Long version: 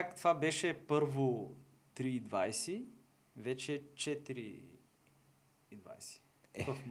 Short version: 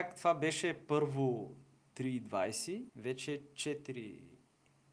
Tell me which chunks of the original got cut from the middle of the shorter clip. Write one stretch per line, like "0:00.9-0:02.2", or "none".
0:02.9-0:03.3